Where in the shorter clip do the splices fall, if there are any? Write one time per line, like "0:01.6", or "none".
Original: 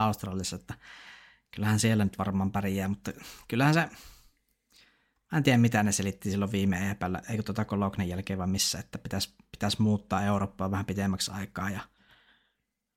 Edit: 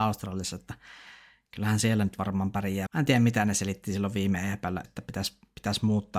0:02.9
0:04.8